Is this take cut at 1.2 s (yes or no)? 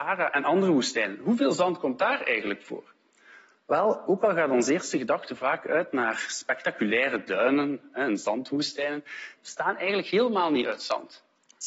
no